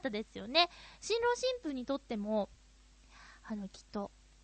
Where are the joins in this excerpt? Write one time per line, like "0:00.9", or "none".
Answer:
none